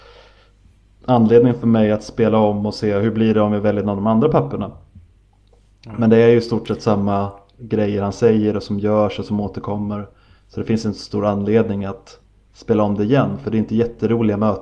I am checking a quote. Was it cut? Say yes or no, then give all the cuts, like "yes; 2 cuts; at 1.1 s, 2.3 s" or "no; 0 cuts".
no; 0 cuts